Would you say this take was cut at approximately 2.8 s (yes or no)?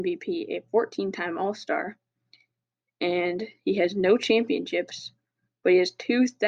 no